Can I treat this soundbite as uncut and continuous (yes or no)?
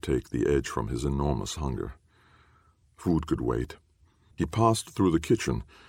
no